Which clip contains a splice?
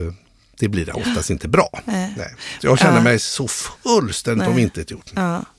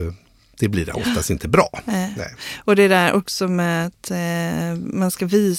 first; 1 cut; at 2.6 s

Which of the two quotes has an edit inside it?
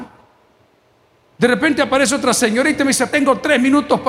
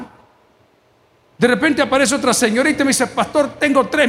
first; 1 cut; at 3.1 s

